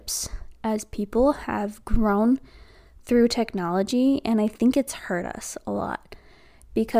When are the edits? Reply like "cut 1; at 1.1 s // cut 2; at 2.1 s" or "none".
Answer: none